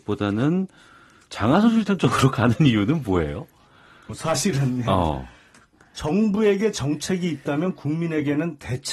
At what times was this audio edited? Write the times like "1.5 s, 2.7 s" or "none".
4.1 s